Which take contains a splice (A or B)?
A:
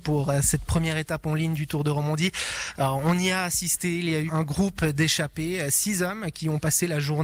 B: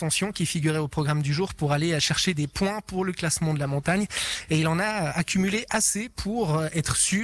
A